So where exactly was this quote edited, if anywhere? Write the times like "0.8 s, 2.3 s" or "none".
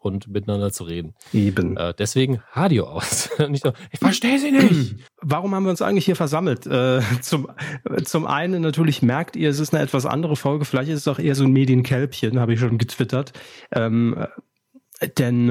5.1 s, 12.7 s